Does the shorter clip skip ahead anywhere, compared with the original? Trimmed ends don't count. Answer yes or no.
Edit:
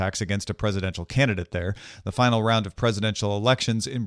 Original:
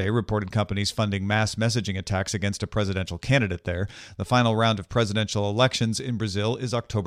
no